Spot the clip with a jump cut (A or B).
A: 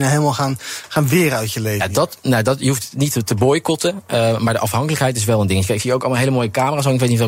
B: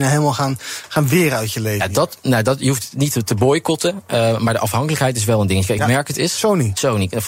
B